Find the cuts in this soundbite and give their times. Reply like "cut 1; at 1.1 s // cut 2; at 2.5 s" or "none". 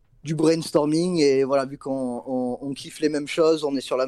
none

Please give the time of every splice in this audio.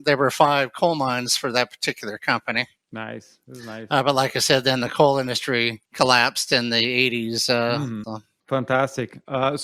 cut 1; at 5.9 s // cut 2; at 8.0 s

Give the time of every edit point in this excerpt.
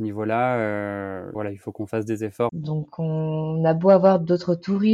cut 1; at 1.3 s // cut 2; at 2.5 s

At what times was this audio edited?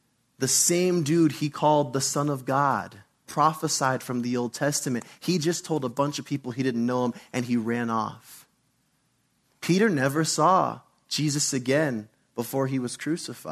cut 1; at 3.3 s

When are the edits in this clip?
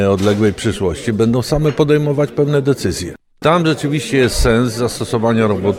cut 1; at 3.4 s

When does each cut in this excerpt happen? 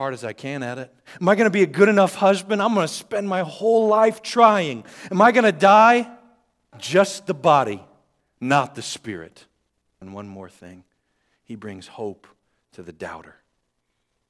cut 1; at 6.7 s // cut 2; at 10.0 s

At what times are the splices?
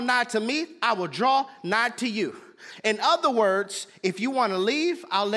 none

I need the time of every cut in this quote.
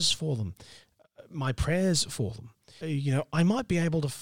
cut 1; at 2.8 s

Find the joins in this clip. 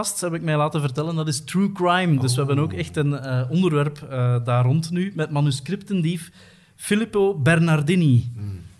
none

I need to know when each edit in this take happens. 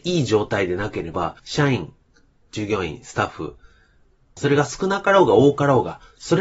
cut 1; at 1.4 s // cut 2; at 4.4 s

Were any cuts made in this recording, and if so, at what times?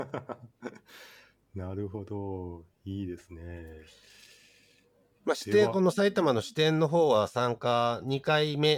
none

